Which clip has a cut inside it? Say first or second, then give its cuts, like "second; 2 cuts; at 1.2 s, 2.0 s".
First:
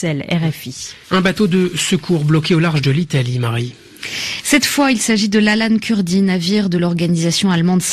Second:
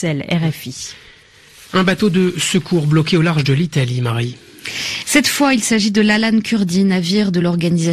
first; 1 cut; at 1.0 s